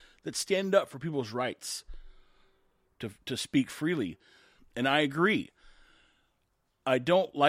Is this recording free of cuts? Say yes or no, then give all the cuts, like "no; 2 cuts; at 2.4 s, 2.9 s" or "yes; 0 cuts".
no; 1 cut; at 4.6 s